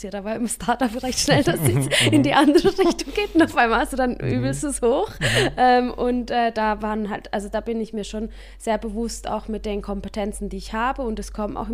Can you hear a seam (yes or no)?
no